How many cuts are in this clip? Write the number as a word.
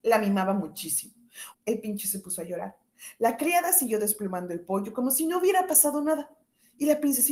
one